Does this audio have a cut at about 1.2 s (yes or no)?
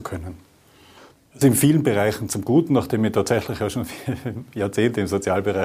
yes